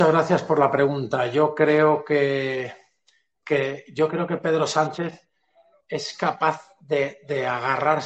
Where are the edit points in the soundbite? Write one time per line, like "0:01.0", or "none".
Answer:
none